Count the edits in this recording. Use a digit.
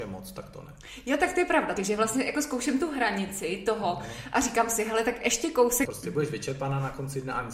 2